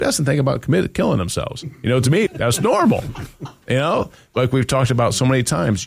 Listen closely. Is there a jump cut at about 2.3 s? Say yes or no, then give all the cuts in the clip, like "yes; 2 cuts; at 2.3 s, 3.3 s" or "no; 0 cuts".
yes; 1 cut; at 2.3 s